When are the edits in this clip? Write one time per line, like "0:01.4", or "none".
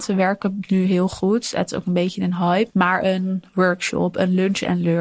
0:02.7